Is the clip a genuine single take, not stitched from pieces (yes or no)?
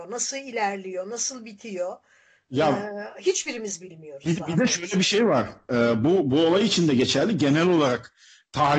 yes